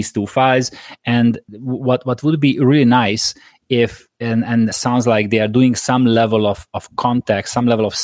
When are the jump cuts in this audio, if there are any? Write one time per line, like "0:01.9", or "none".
0:04.7